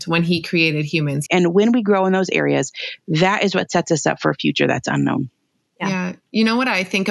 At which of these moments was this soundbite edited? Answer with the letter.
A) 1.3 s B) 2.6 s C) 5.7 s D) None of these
A